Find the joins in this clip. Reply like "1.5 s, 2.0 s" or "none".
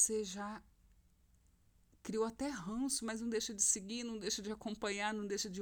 none